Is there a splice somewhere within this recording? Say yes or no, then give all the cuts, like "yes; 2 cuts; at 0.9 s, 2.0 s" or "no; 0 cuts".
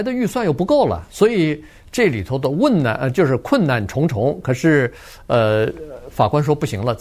no; 0 cuts